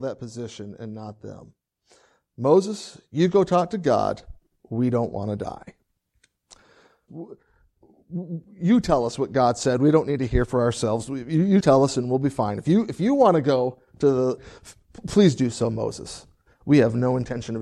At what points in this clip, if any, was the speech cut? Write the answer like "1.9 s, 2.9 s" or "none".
7.1 s, 11.6 s, 14.4 s